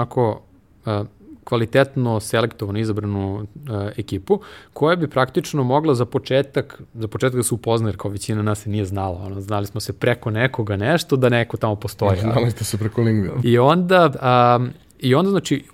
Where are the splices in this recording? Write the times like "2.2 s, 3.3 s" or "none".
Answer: 13.4 s